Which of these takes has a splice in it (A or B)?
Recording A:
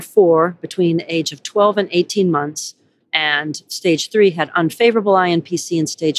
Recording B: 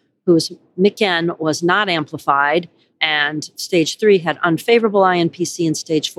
A